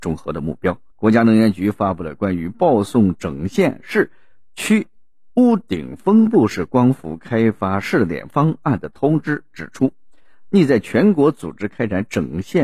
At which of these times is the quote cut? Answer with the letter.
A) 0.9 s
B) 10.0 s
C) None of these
A